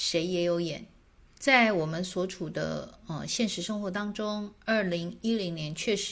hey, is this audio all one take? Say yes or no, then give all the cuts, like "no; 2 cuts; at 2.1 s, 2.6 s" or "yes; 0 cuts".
no; 1 cut; at 1.3 s